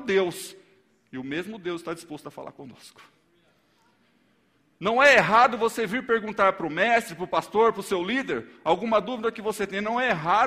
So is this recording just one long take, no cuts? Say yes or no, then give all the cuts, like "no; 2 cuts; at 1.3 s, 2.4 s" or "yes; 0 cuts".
yes; 0 cuts